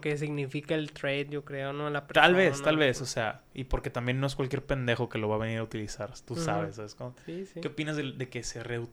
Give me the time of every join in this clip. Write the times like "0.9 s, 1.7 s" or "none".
none